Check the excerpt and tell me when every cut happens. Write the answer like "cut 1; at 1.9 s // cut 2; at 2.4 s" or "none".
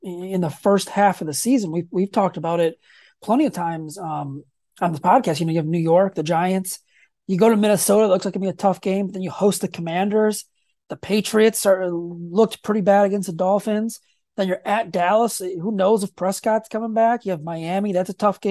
none